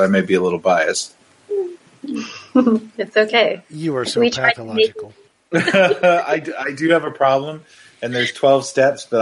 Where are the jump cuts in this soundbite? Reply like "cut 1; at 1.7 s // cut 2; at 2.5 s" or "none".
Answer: none